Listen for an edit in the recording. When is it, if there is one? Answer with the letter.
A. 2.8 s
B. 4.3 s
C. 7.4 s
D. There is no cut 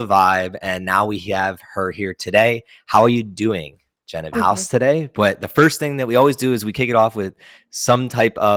B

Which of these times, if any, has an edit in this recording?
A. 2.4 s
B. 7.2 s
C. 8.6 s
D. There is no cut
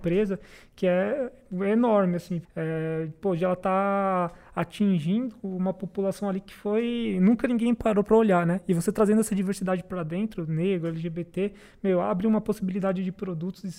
A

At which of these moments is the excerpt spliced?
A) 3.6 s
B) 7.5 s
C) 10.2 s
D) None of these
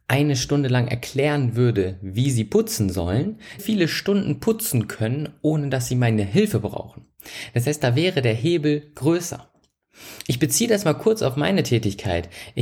A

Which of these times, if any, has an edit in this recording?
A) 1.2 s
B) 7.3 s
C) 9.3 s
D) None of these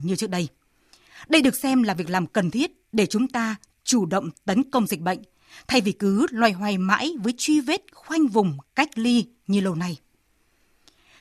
D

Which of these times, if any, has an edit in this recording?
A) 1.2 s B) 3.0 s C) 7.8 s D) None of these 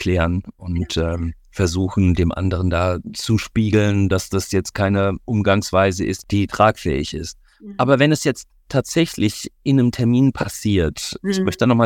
B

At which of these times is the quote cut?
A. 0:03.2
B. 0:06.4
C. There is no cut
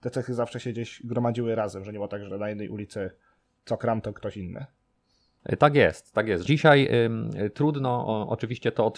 B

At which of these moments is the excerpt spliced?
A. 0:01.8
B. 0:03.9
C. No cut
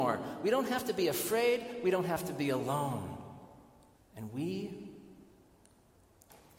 B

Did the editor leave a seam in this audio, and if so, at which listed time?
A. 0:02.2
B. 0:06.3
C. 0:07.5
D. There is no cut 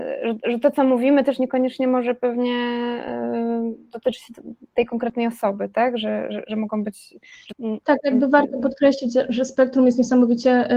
C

